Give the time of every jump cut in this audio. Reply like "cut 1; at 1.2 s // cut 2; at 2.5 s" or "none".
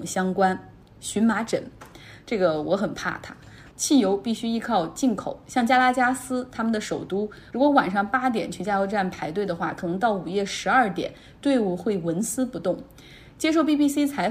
cut 1; at 3.7 s